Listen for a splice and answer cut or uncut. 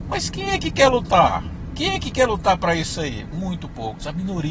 uncut